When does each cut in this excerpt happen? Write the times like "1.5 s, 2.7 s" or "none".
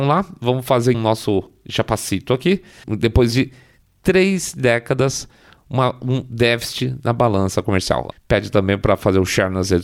0.9 s, 2.8 s, 8.1 s